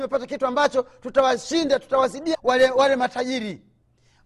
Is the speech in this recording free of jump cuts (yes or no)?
no